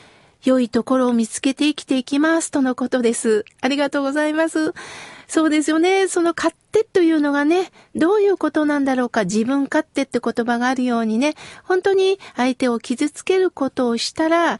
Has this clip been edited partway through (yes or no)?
no